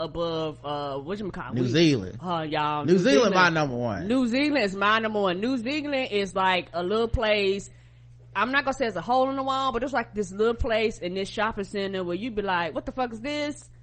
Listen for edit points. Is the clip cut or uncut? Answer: uncut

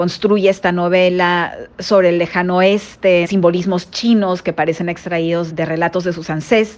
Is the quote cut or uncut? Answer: cut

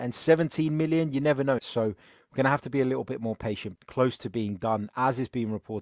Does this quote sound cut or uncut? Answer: cut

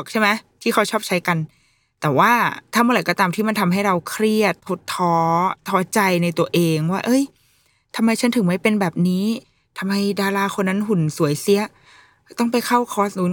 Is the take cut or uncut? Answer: uncut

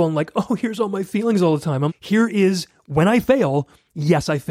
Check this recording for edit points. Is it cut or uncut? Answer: cut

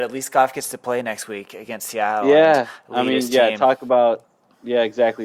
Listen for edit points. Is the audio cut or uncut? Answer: uncut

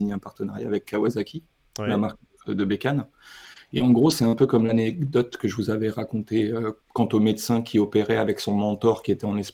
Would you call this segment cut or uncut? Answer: cut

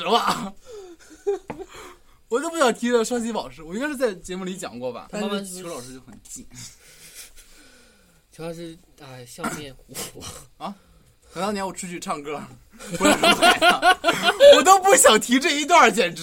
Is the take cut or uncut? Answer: cut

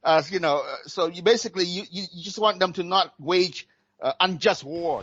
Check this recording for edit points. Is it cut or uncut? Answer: uncut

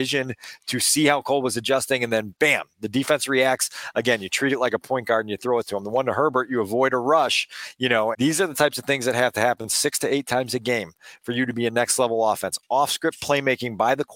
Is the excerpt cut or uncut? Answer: cut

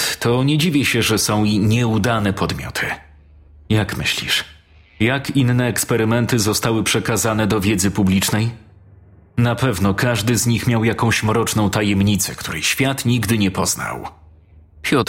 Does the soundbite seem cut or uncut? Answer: uncut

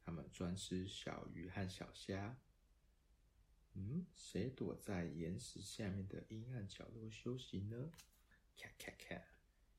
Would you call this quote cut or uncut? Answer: uncut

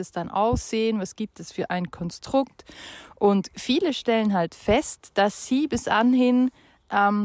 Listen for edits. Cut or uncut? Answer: uncut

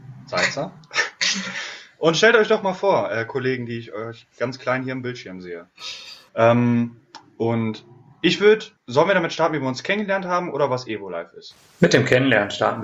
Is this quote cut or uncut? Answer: cut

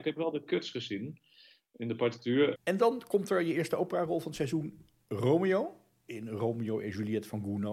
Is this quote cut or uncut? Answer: cut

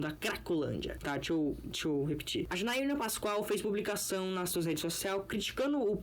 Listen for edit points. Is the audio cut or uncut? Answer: uncut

